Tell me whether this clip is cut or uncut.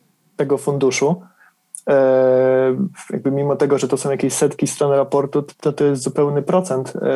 cut